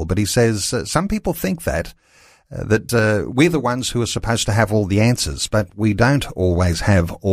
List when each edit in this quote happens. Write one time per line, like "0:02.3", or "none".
none